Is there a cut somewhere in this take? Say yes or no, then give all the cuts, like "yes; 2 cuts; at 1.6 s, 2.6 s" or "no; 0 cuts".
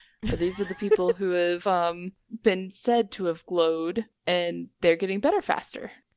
no; 0 cuts